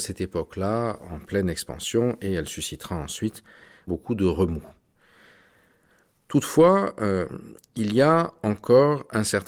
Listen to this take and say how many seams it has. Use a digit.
0